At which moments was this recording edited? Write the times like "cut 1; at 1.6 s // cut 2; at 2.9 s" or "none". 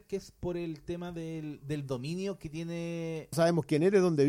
cut 1; at 3.3 s